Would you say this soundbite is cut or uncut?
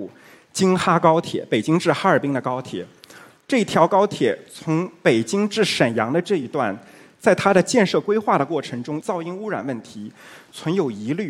cut